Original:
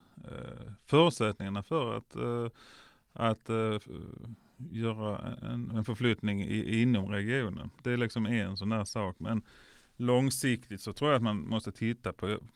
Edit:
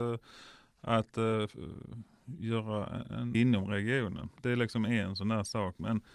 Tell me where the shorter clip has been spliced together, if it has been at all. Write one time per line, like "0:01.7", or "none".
0:03.3